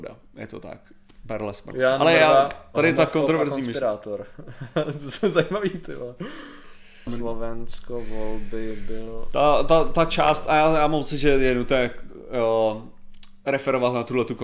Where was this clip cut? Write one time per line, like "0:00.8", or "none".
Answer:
0:01.7
0:07.1